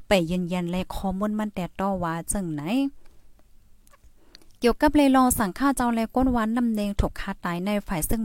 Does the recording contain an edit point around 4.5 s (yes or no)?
no